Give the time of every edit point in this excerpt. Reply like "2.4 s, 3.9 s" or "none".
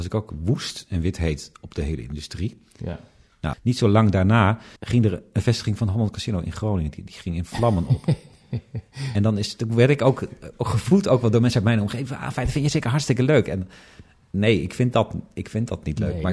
3.5 s, 4.8 s